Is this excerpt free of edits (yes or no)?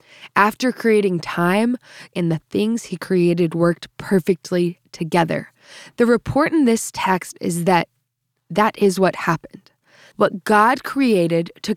no